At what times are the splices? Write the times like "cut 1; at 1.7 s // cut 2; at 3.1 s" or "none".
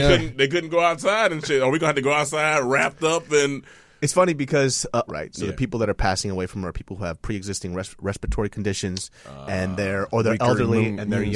cut 1; at 5.1 s